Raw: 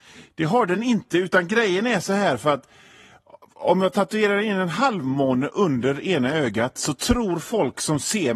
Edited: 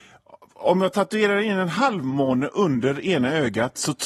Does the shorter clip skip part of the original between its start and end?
no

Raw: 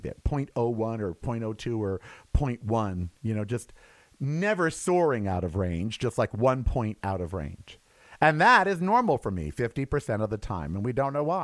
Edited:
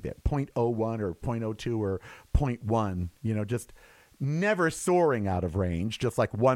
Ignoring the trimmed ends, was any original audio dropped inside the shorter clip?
no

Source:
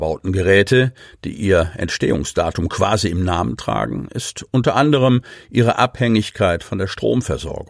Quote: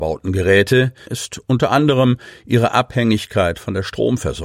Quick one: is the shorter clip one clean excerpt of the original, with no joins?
no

